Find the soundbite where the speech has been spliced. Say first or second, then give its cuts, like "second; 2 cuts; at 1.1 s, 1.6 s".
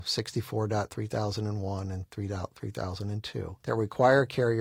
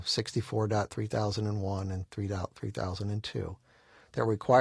first; 1 cut; at 3.6 s